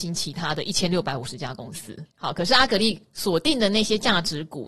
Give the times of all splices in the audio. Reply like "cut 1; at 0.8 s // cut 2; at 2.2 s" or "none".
cut 1; at 2.1 s